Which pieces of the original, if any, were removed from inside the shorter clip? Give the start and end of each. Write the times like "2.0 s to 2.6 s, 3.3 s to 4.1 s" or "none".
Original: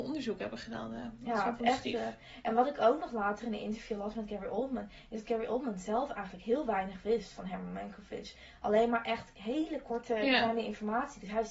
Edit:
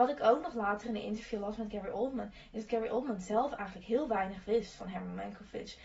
none